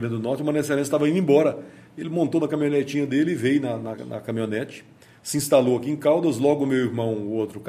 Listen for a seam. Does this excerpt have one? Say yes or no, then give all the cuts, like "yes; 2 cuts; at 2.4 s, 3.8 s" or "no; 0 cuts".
no; 0 cuts